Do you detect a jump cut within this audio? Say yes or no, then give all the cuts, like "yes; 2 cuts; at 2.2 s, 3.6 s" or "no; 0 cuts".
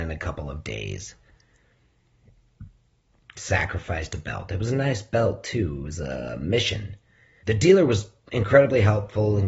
yes; 2 cuts; at 3.2 s, 7.4 s